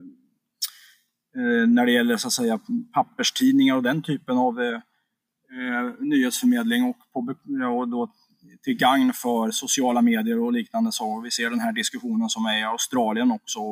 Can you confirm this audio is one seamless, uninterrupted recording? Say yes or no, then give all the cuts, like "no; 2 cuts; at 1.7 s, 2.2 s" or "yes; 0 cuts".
yes; 0 cuts